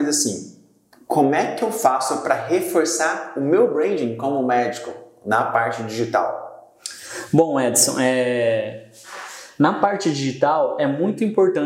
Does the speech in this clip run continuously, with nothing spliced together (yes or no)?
yes